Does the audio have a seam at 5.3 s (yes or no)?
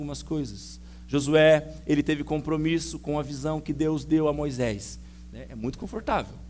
yes